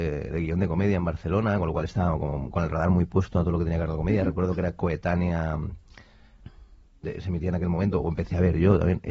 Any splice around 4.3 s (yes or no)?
no